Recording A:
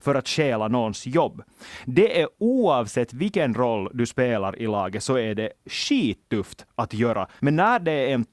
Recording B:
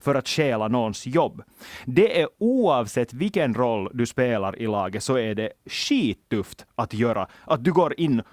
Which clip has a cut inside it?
A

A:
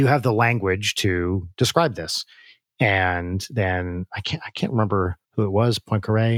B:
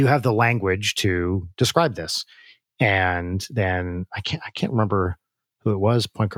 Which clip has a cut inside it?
A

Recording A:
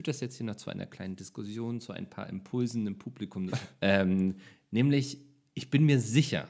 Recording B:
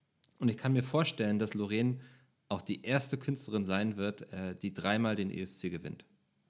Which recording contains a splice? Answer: A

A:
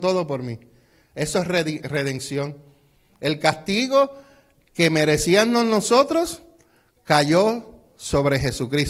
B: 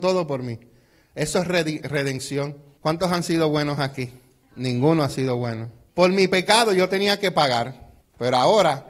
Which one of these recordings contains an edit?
B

